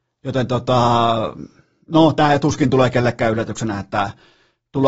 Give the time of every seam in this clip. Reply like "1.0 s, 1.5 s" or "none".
none